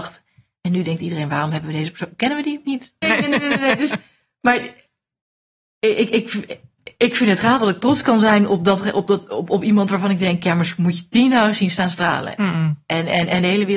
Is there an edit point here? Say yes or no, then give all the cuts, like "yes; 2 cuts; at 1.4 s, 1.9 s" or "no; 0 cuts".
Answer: yes; 1 cut; at 3.0 s